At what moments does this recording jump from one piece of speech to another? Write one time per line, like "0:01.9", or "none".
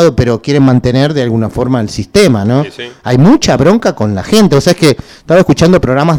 none